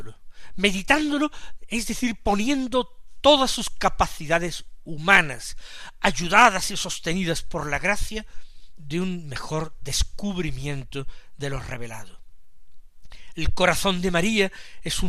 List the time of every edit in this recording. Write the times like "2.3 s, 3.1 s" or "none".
8.8 s

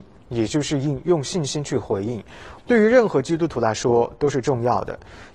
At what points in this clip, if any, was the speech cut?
2.6 s

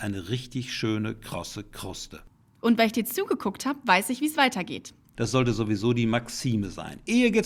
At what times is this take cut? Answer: 5.1 s

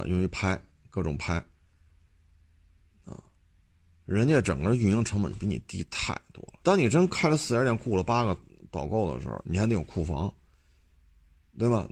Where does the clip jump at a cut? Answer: 6.6 s, 9.4 s

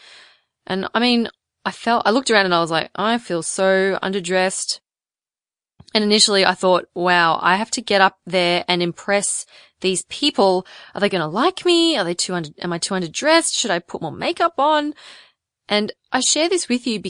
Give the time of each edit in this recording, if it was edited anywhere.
none

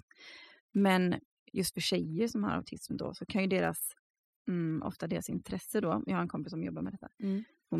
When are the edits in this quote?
none

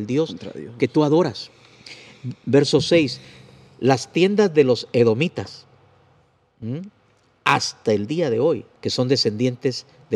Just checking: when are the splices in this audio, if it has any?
8.8 s

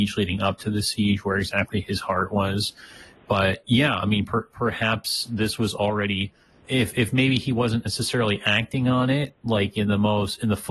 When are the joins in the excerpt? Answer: 6.6 s

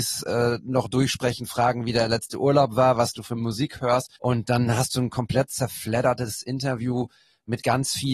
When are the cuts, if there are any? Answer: 4.2 s

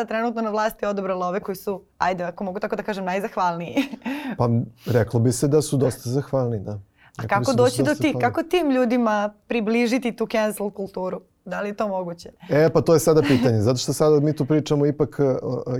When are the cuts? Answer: 1.9 s

